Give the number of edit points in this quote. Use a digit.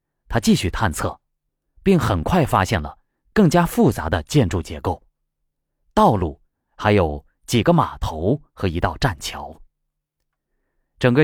1